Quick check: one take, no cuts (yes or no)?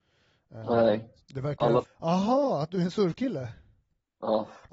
no